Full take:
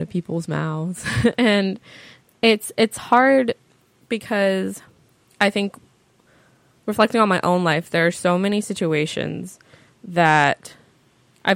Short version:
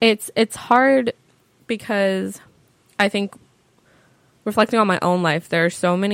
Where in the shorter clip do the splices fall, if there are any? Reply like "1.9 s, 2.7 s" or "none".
none